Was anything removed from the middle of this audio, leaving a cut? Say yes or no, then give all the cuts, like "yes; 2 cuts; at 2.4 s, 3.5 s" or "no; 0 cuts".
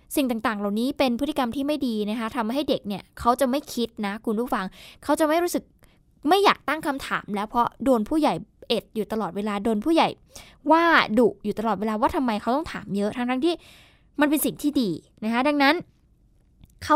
no; 0 cuts